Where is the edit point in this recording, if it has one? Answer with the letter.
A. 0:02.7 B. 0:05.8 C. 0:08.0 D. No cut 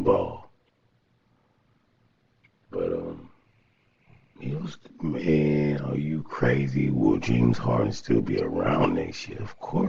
D